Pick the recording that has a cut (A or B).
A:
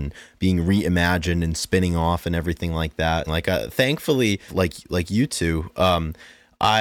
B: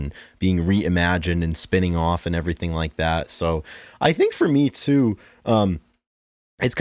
A